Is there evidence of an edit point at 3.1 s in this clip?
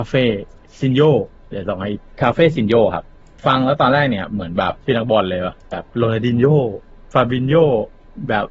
no; 1 cut; at 4.8 s

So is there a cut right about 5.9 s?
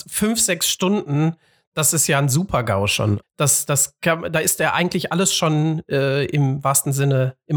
no; 1 cut; at 3.2 s

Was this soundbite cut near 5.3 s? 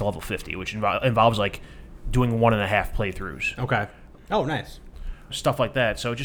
yes; 2 cuts; at 4.2 s, 5.3 s

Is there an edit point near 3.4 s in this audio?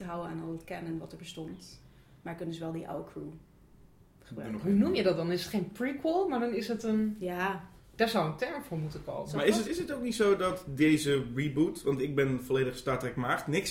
no; 1 cut; at 9.6 s

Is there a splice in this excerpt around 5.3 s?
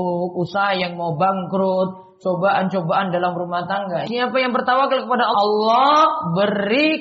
yes; 2 cuts; at 4.1 s, 5.3 s

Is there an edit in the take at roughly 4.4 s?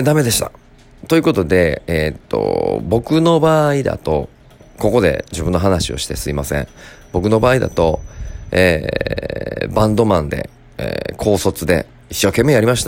no; 1 cut; at 1.0 s

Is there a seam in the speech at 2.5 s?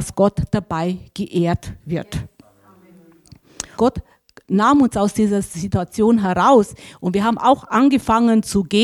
no; 1 cut; at 3.8 s

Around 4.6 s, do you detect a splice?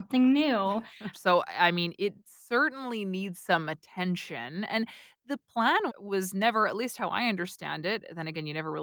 no; 2 cuts; at 1.1 s, 5.9 s

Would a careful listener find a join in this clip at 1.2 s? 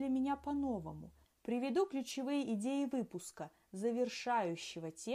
yes; 1 cut; at 1.2 s

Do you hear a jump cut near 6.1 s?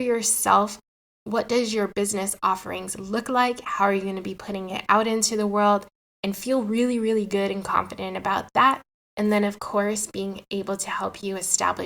no; 0 cuts

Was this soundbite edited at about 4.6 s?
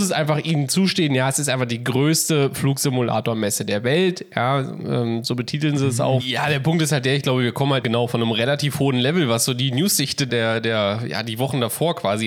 no; 3 cuts; at 6.2 s, 7.8 s, 10.3 s

